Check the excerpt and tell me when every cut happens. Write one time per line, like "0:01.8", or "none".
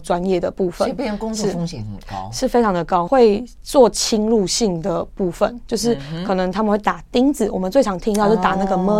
0:03.1